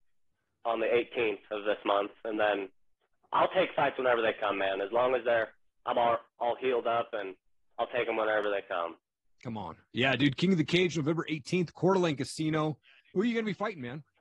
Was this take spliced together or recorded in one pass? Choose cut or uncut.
uncut